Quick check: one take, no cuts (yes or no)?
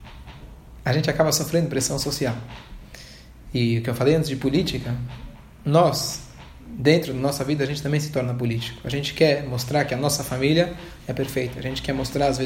yes